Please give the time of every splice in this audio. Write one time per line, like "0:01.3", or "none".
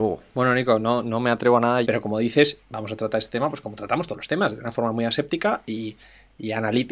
0:01.8